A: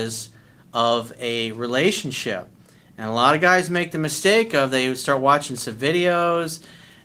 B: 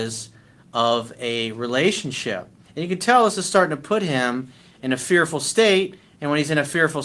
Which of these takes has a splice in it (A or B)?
B